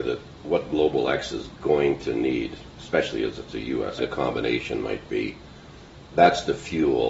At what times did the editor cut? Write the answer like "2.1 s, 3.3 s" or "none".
4.0 s